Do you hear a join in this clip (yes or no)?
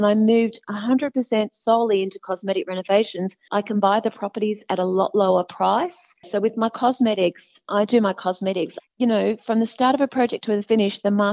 yes